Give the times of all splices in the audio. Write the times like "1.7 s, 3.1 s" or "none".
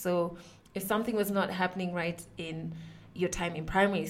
3.2 s